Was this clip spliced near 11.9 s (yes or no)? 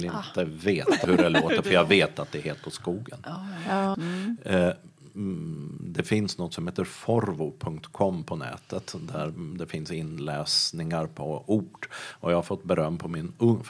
no